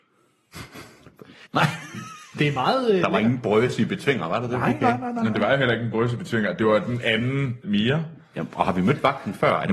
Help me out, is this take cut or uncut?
cut